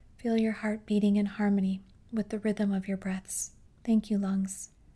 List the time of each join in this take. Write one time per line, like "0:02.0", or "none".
0:03.7

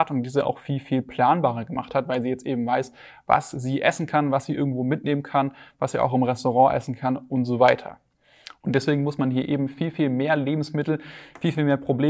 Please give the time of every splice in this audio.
0:08.6

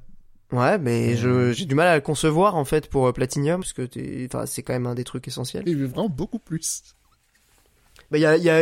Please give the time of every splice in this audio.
0:03.6
0:05.6

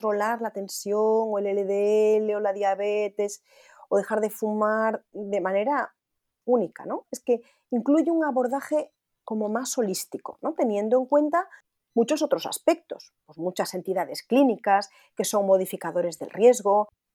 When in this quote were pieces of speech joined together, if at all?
none

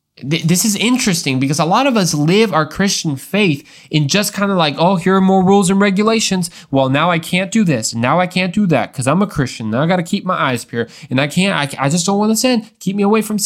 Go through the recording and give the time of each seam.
none

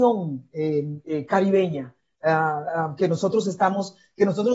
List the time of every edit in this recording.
none

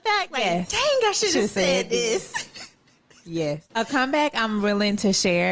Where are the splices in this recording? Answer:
0:03.7

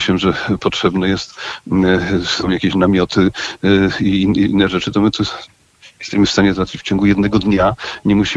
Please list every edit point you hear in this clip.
none

